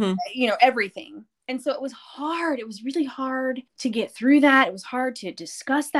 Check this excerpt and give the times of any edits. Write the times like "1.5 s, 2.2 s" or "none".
3.7 s